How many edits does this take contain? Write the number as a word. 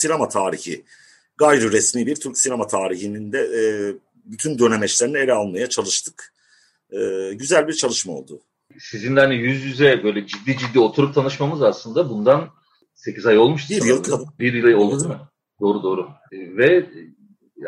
two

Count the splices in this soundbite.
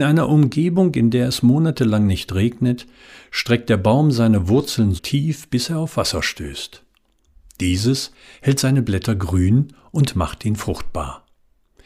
one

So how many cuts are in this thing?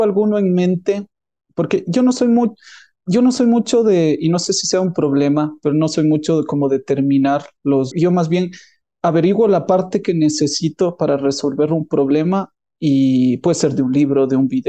one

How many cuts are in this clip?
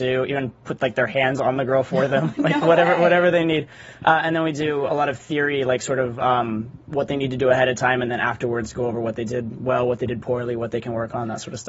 one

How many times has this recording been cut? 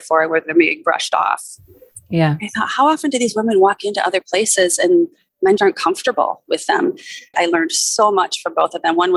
two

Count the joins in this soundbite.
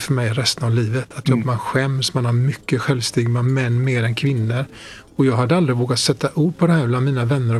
one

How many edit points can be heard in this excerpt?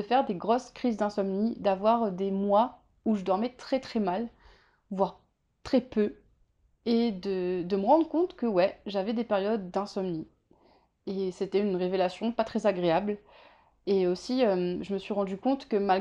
zero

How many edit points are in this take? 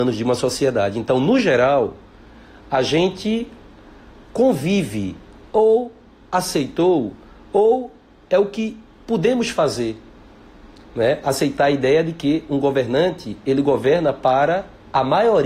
zero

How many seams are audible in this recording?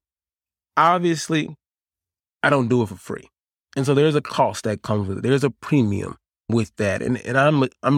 zero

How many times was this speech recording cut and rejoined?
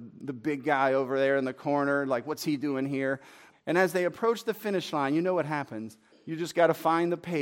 two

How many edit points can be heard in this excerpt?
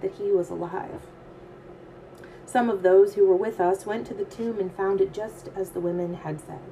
zero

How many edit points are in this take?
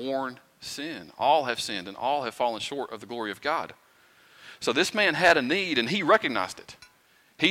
zero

